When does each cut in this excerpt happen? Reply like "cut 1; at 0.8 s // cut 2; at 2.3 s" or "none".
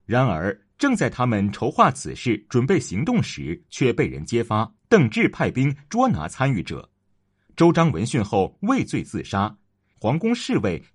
cut 1; at 4.8 s // cut 2; at 9.9 s